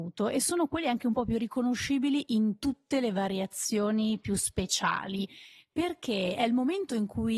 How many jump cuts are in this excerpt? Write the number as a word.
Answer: zero